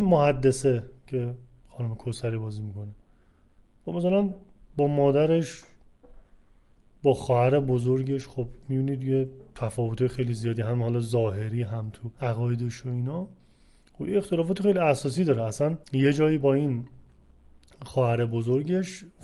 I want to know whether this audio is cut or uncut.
cut